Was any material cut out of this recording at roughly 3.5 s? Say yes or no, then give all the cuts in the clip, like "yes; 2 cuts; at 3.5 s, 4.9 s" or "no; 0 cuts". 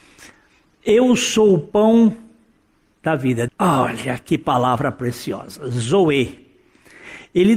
yes; 1 cut; at 3.5 s